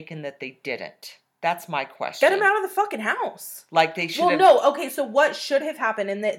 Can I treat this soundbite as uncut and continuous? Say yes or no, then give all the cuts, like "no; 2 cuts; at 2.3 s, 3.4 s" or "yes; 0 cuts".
yes; 0 cuts